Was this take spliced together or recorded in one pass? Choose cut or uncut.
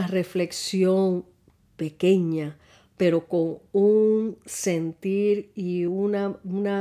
uncut